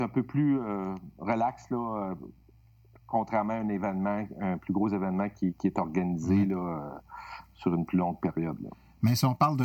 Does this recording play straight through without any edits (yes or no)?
yes